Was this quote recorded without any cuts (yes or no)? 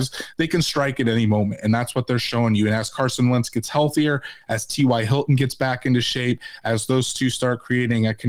yes